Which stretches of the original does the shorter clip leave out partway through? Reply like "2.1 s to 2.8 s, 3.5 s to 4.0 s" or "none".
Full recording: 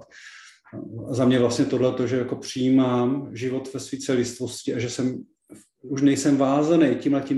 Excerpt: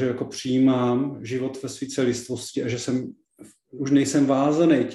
none